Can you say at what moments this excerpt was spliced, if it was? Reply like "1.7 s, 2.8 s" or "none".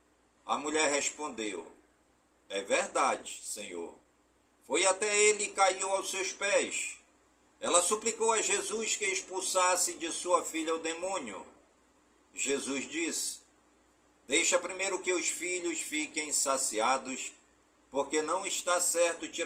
4.5 s, 7.5 s